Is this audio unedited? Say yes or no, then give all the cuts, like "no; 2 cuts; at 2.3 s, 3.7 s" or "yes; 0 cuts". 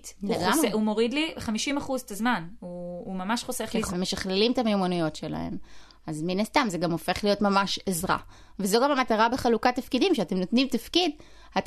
no; 1 cut; at 3.9 s